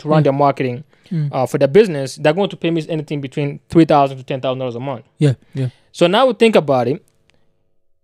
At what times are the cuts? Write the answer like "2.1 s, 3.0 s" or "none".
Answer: none